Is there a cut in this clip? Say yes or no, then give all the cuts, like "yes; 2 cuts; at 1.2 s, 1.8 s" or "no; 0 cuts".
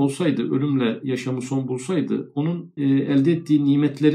yes; 1 cut; at 2.8 s